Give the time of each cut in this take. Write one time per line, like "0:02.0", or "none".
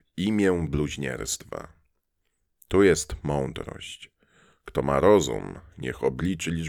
none